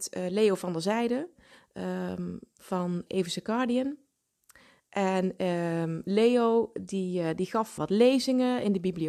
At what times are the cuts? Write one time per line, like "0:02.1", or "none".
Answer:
0:03.1
0:07.8